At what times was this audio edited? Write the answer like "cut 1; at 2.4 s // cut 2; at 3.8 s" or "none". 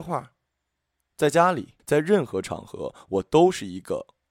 cut 1; at 1.8 s

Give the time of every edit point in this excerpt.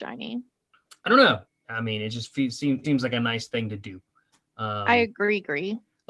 cut 1; at 1.5 s // cut 2; at 2.8 s

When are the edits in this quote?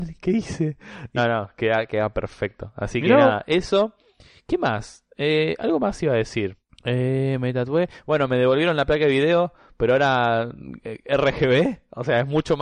cut 1; at 1.2 s

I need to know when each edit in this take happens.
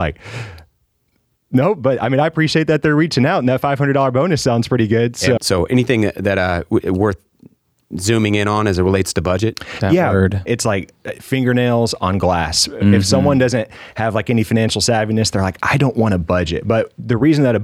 cut 1; at 5.4 s // cut 2; at 10.5 s

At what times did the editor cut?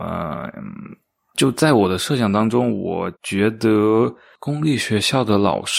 cut 1; at 3.2 s

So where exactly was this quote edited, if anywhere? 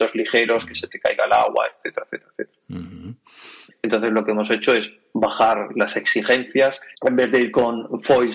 cut 1; at 3.7 s // cut 2; at 6.9 s

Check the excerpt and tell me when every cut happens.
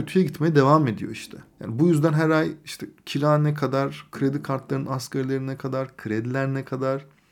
cut 1; at 1.5 s

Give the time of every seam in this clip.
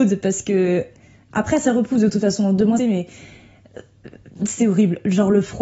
cut 1; at 2.8 s

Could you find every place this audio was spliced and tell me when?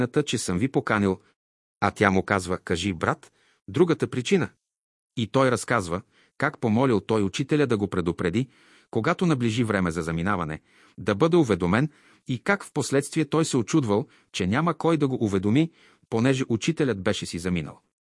none

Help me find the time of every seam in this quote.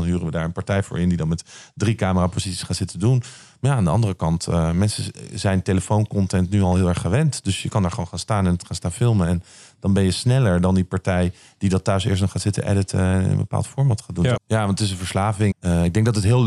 cut 1; at 14.4 s // cut 2; at 15.5 s

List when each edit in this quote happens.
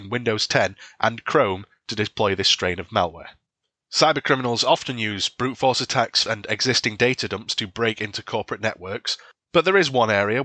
cut 1; at 6.3 s

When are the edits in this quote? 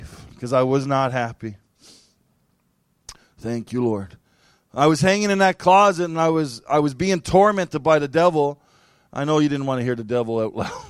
none

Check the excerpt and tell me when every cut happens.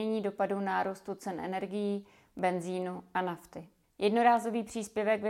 none

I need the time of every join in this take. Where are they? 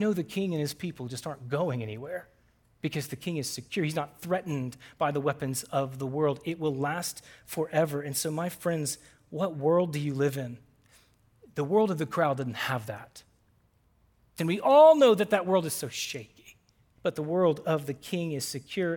cut 1; at 14.4 s // cut 2; at 17.0 s

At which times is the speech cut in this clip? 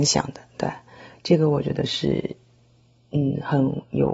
none

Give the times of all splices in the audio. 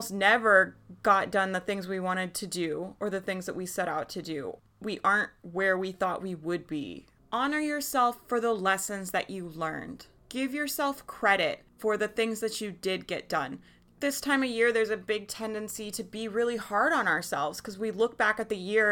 cut 1; at 7.2 s

